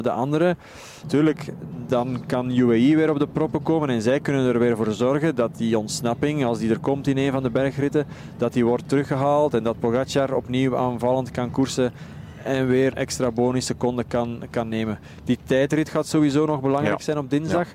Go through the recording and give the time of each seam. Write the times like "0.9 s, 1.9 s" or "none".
1.0 s, 12.9 s